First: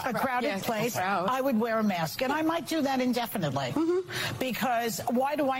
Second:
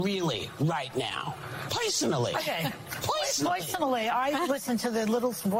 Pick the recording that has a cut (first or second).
second